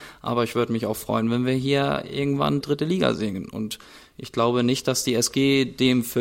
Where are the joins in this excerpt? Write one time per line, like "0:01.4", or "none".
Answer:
0:02.6